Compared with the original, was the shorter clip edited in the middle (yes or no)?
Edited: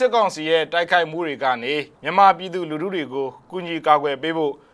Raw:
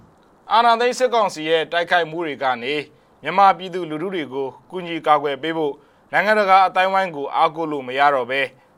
yes